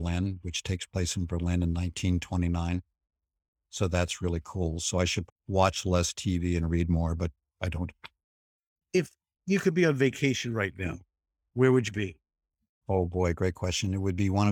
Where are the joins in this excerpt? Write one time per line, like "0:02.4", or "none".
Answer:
0:05.3